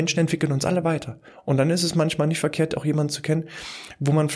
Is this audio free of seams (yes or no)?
yes